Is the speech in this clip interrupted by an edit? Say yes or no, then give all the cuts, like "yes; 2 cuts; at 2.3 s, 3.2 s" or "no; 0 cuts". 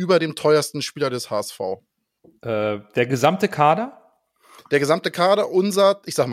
no; 0 cuts